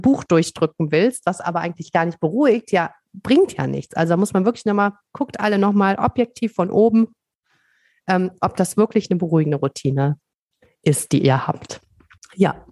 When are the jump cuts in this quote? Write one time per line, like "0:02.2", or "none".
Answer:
none